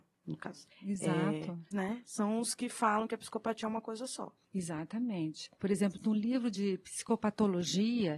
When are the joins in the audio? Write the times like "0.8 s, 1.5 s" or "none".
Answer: 1.7 s